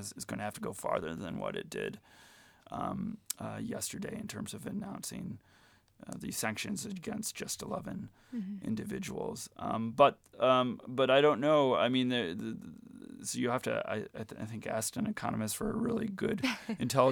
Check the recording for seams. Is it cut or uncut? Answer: uncut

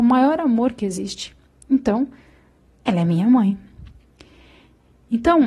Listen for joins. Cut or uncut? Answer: uncut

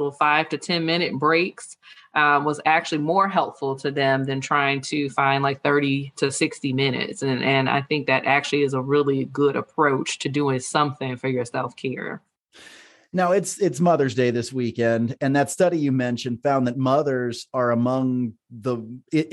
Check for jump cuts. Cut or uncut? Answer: uncut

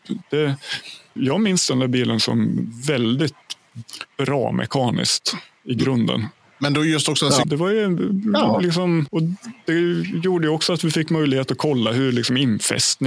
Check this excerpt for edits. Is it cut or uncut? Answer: cut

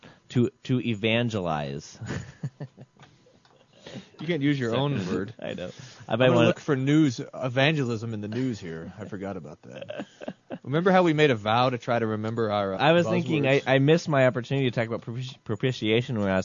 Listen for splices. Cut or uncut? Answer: cut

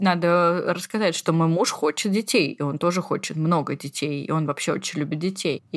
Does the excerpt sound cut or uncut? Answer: uncut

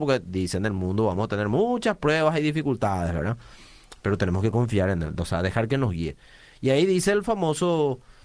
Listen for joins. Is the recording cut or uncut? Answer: uncut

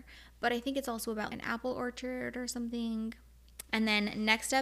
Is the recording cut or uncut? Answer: cut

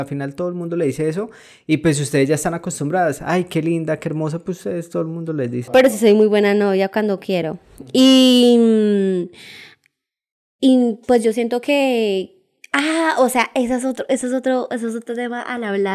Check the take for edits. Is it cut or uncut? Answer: cut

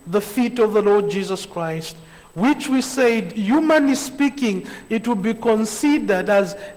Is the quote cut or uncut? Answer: uncut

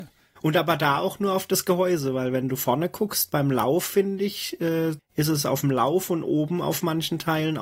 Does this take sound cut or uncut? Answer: cut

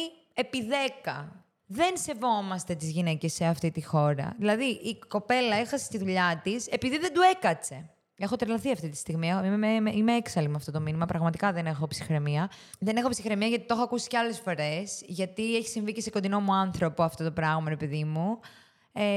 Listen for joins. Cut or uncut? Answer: uncut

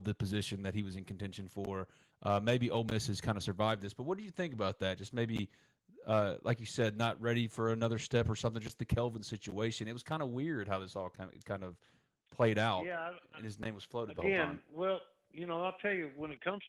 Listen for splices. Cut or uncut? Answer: uncut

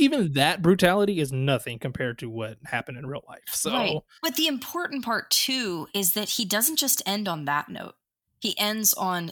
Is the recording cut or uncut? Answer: uncut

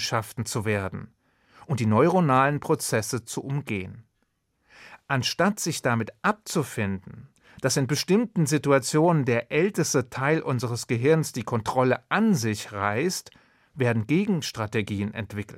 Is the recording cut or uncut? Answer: uncut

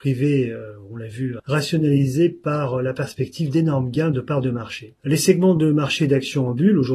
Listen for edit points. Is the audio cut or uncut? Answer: cut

